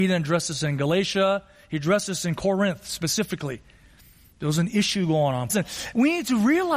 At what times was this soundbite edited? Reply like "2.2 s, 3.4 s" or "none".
5.5 s